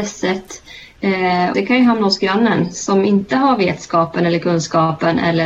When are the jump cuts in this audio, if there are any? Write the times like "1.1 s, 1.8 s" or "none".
1.5 s